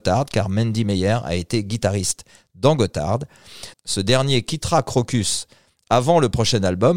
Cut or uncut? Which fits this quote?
cut